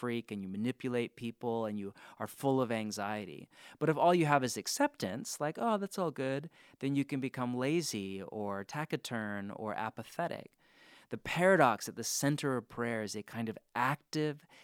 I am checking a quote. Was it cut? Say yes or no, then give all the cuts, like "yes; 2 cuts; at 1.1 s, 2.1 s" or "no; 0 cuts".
no; 0 cuts